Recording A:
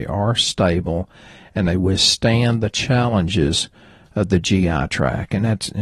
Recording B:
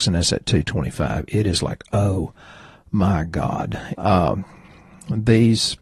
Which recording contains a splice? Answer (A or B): B